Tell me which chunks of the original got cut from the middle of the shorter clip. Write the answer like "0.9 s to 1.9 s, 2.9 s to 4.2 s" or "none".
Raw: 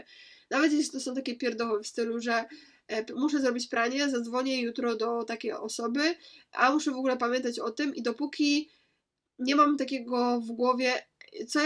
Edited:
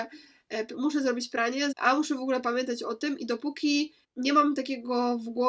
4.1 s to 6.5 s, 8.8 s to 9.3 s